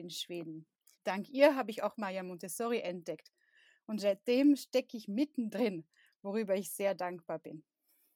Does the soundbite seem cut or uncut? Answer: cut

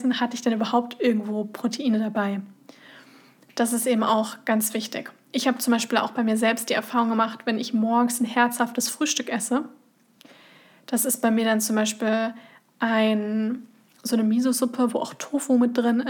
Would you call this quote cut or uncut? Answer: uncut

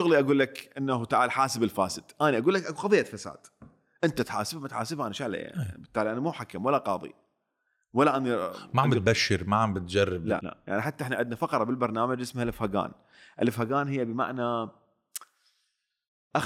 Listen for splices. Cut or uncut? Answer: cut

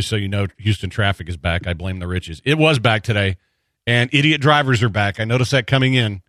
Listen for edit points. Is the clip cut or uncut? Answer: uncut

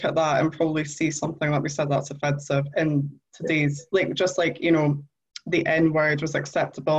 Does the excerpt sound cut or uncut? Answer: uncut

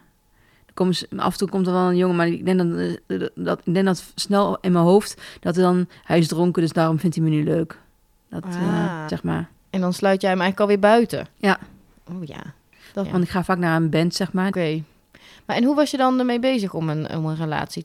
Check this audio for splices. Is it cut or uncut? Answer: cut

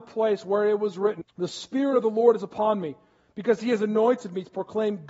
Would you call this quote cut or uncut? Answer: cut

